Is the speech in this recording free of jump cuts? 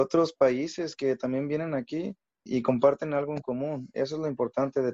yes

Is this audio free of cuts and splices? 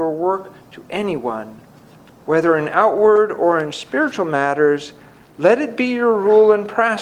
yes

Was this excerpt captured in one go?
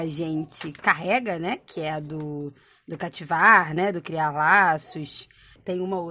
yes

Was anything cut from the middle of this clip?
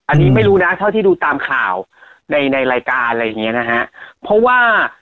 no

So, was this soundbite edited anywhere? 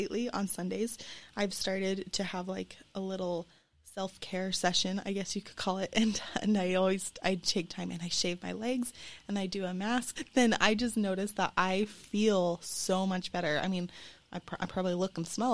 yes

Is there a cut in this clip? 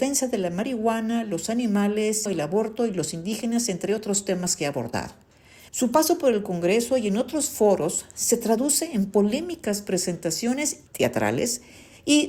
yes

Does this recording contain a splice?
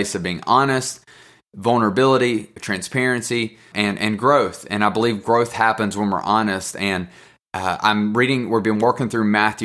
yes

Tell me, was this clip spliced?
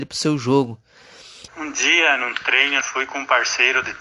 yes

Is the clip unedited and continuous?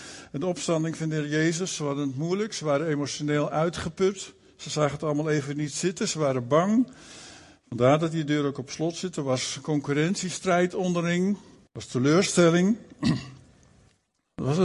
no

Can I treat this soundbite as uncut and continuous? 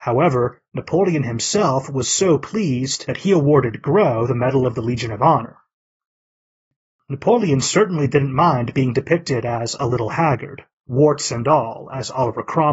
yes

